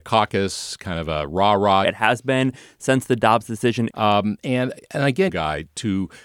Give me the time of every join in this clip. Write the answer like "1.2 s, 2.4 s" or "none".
1.8 s, 3.9 s, 5.3 s